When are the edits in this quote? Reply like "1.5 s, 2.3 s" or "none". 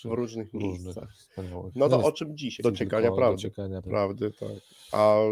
2.6 s, 3.8 s